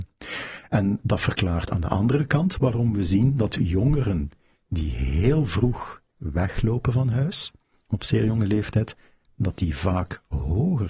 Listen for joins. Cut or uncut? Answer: uncut